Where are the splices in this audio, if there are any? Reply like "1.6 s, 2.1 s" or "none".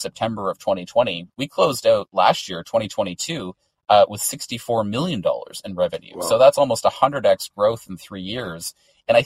1.3 s